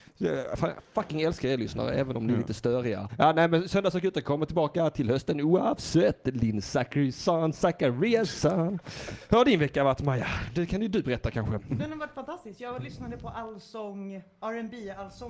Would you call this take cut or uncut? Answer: cut